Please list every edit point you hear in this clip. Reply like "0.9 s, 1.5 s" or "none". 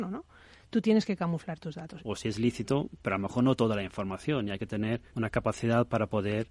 2.0 s, 5.1 s

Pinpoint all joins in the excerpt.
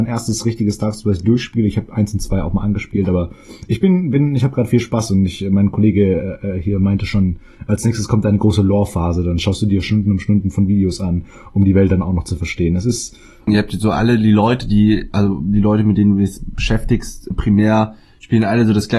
13.5 s, 17.3 s

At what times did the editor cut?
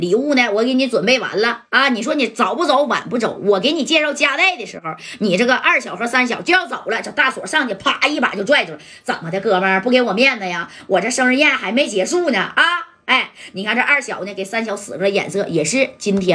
none

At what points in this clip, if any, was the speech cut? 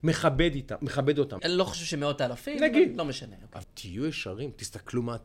1.4 s, 3.6 s

